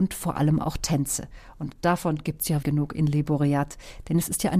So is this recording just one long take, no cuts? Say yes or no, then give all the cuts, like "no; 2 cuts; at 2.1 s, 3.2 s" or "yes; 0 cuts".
no; 1 cut; at 2.6 s